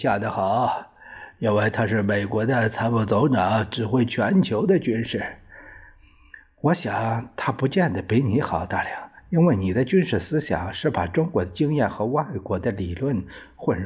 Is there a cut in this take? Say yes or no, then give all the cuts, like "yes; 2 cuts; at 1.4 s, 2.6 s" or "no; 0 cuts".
no; 0 cuts